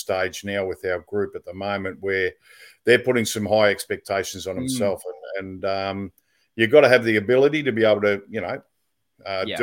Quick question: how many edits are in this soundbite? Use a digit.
0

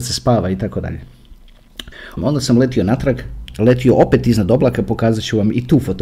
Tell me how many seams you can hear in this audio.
1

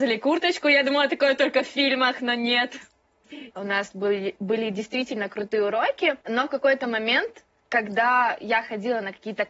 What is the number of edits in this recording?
2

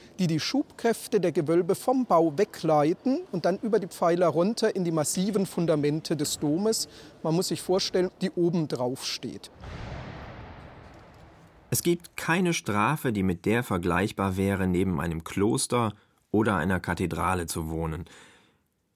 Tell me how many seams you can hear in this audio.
1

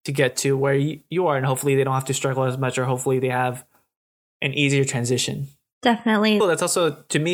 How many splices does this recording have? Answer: 1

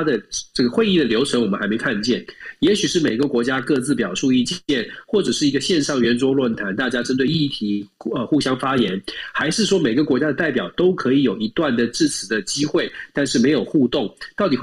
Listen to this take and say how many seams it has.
0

